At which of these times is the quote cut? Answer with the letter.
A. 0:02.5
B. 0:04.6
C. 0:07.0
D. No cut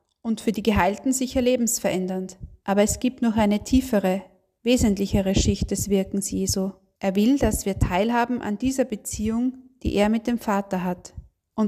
C